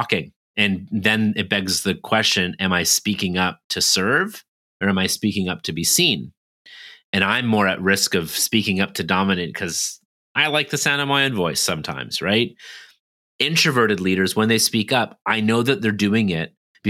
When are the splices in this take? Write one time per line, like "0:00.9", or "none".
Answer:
none